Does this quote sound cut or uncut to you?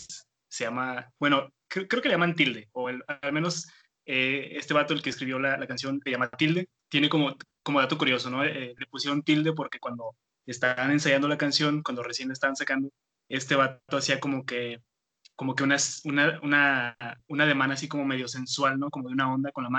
uncut